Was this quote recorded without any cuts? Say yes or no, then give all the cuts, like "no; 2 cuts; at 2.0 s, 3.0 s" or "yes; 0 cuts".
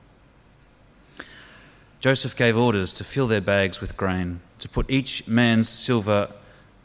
no; 2 cuts; at 2.0 s, 4.5 s